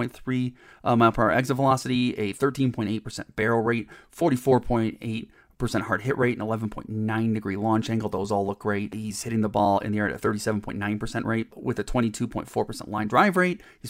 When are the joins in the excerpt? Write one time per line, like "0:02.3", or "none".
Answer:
none